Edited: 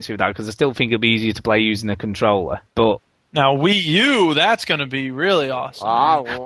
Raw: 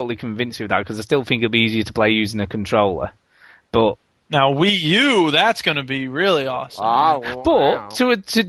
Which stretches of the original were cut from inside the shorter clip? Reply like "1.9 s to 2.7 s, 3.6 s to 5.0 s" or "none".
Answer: 3.2 s to 3.6 s